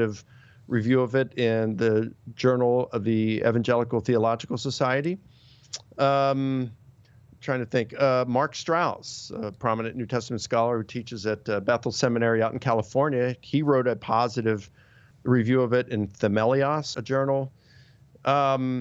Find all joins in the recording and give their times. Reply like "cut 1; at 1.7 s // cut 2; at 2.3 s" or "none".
cut 1; at 15.1 s // cut 2; at 16.9 s